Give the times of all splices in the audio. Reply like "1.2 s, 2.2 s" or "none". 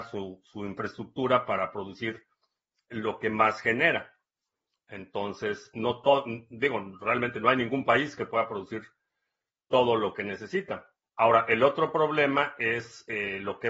5.7 s, 11.0 s